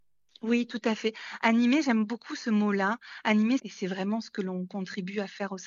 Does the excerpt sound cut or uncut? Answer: cut